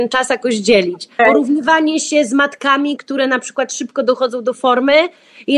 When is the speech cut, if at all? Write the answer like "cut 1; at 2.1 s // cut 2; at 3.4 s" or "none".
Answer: cut 1; at 1.2 s // cut 2; at 3.0 s